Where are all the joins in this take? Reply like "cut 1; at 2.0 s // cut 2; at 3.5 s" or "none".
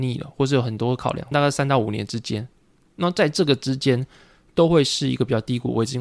cut 1; at 1.3 s